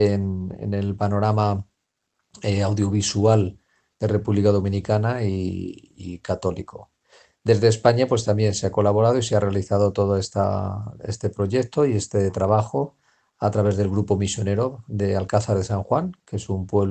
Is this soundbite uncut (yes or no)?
yes